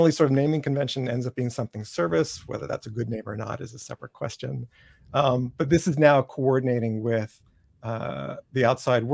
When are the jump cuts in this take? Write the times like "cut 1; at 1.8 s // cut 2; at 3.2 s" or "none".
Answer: none